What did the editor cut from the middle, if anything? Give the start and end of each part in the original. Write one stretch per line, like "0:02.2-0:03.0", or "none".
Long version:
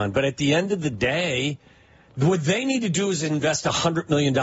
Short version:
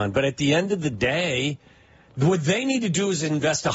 none